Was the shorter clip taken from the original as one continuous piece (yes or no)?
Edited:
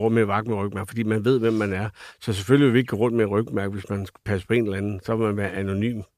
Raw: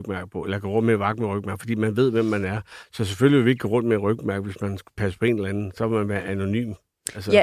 yes